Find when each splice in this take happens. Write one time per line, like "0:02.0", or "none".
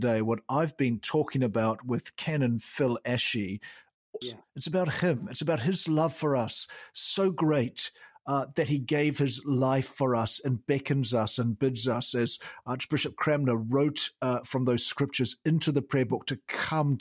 0:04.2